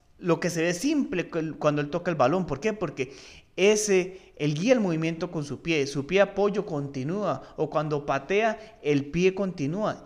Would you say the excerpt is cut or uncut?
uncut